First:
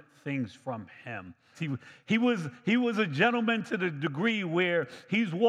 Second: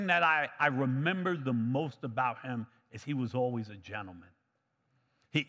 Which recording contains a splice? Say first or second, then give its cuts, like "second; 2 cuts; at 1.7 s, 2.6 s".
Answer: first; 1 cut; at 1.5 s